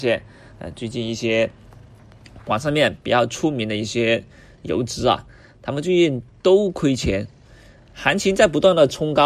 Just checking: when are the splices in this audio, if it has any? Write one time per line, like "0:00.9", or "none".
none